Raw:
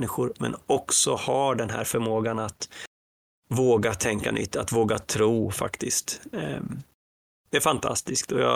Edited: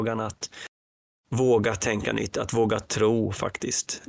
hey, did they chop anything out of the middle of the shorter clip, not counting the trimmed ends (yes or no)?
no